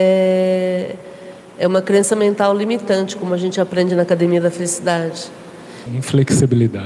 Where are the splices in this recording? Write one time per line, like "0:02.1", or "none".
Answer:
0:05.9